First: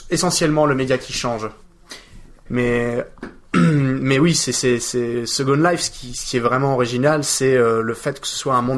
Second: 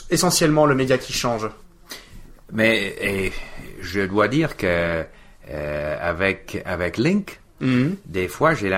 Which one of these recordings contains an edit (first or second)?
first